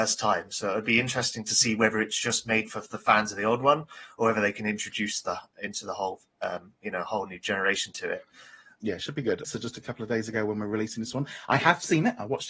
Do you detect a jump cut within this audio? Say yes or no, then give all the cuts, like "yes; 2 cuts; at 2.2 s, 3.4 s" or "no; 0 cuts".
yes; 1 cut; at 9.4 s